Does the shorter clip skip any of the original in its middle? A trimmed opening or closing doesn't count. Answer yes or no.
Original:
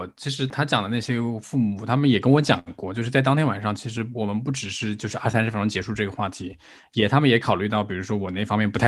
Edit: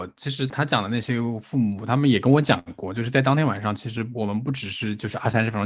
no